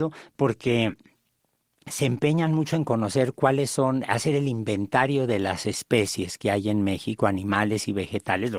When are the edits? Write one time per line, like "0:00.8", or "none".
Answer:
none